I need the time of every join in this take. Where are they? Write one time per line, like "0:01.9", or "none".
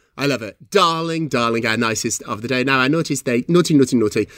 0:01.3